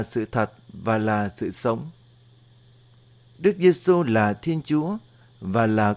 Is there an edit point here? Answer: no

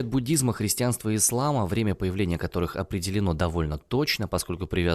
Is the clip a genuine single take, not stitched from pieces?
yes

